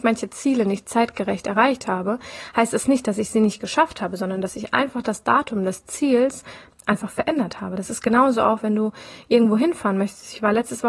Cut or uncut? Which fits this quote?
uncut